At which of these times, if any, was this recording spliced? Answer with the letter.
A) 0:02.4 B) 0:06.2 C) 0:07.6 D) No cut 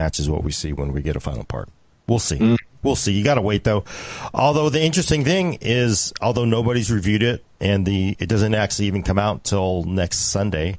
C